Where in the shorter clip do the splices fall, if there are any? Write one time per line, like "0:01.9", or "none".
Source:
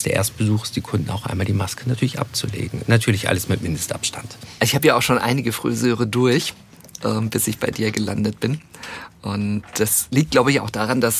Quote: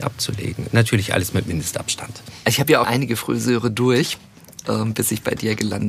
0:02.8